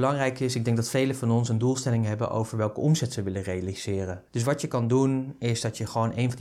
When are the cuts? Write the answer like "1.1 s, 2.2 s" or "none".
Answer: 4.3 s